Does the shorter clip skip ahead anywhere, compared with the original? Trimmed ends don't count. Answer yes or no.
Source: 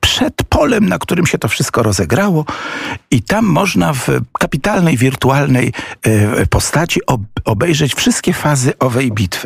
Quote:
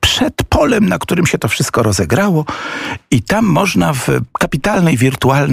no